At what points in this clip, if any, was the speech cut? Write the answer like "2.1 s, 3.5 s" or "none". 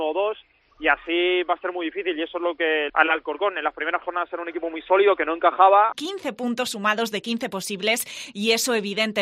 2.9 s, 5.9 s

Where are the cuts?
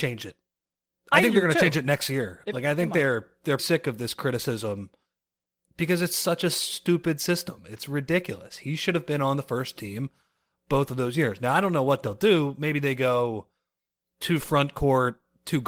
3.6 s

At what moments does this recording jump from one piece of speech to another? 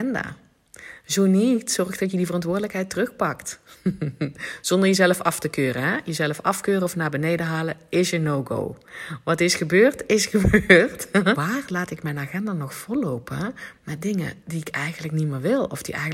11.3 s, 14.4 s

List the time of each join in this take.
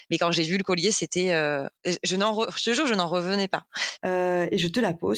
1.8 s, 4.0 s

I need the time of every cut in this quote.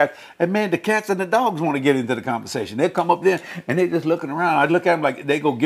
4.7 s

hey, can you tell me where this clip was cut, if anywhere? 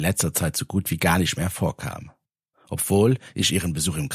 2.5 s

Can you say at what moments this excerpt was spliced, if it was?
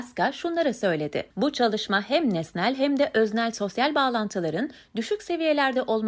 1.3 s

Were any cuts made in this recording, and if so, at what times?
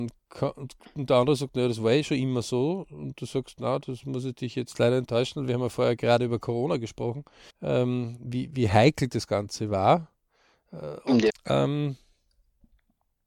7.5 s, 11.3 s

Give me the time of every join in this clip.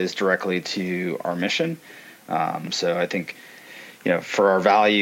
none

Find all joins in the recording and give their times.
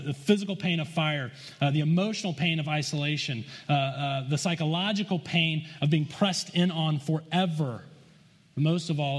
none

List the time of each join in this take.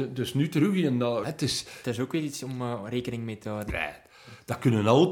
1.2 s, 3.7 s

